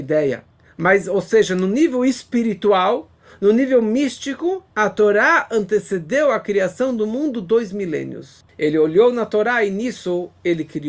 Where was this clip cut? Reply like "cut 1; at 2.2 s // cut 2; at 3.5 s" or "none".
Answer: cut 1; at 4.7 s // cut 2; at 8.5 s